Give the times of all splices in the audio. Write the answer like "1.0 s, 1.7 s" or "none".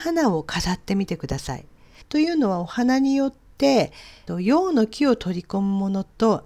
2.0 s, 4.3 s